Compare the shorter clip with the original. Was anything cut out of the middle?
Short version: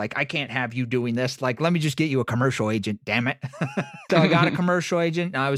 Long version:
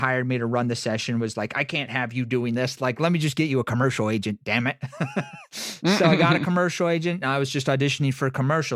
yes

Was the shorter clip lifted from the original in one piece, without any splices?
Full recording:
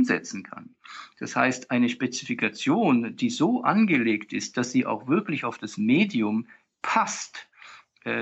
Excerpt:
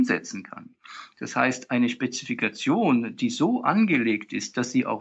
yes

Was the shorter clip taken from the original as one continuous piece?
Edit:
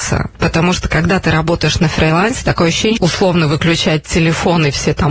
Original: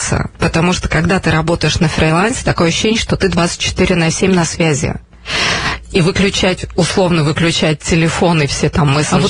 no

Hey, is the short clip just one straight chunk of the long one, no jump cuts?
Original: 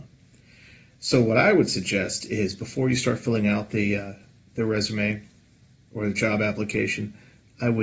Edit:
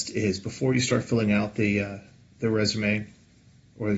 yes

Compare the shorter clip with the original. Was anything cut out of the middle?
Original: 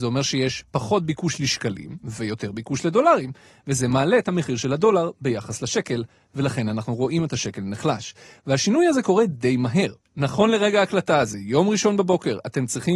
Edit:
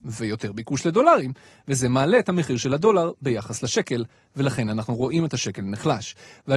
no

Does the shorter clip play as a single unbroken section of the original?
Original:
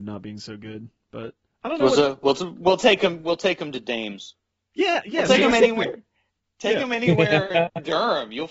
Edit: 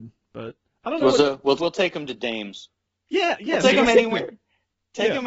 no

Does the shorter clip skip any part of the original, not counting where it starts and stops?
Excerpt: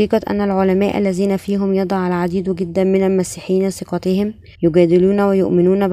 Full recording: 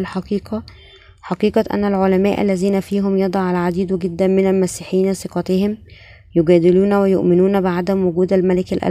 yes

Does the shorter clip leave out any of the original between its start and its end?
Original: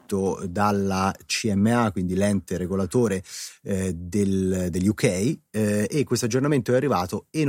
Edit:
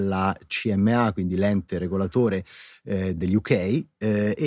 yes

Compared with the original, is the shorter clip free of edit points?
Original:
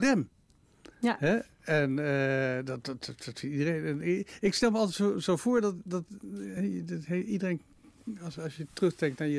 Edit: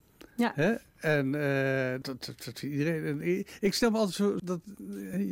no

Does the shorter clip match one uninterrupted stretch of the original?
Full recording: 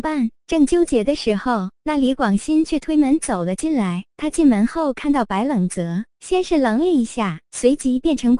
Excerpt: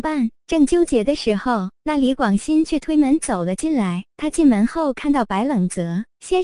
yes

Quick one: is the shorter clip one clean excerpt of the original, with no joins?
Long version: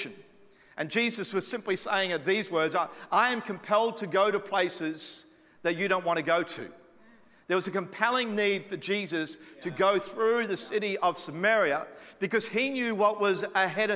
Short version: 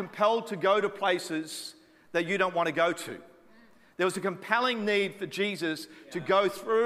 yes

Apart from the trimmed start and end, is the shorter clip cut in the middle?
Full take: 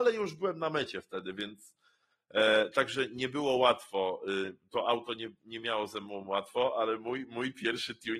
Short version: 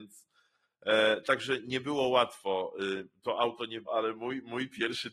yes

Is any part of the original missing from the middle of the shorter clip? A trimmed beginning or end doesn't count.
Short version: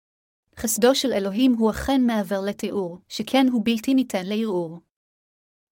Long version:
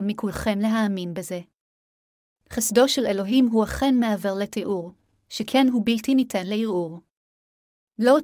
yes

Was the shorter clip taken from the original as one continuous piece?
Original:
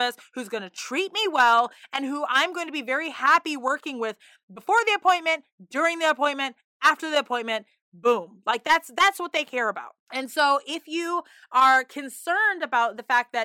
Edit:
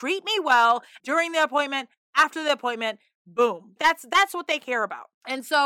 no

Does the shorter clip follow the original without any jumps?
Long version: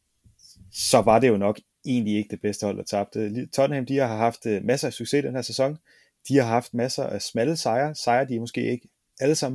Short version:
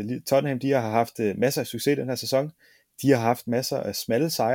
yes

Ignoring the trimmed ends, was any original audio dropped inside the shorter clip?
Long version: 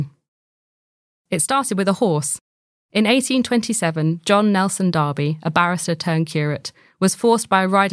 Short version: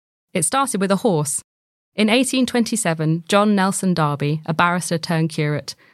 no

